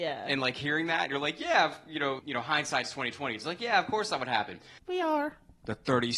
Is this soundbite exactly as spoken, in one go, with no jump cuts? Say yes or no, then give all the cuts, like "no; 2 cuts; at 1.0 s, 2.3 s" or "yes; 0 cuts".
no; 2 cuts; at 2.2 s, 4.8 s